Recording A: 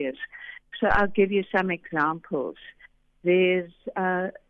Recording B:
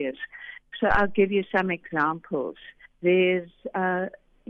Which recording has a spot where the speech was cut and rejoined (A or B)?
B